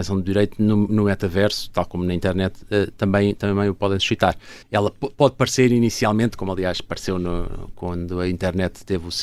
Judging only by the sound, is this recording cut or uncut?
cut